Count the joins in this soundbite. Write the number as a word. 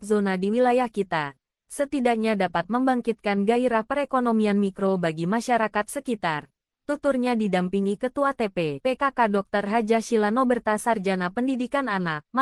one